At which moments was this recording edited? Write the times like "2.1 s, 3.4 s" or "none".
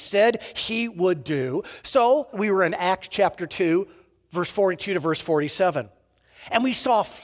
2.3 s